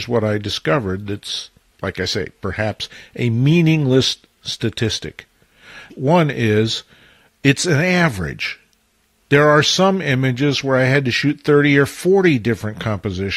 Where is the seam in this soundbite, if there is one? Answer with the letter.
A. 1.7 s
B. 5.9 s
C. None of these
B